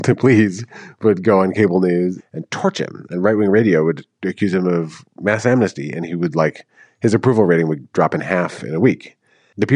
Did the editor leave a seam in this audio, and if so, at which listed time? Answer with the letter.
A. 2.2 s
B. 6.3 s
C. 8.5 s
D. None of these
A